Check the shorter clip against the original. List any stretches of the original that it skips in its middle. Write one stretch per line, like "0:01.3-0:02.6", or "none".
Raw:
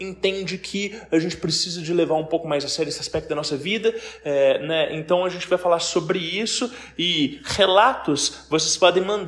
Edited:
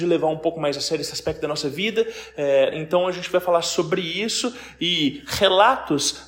0:04.6-0:04.9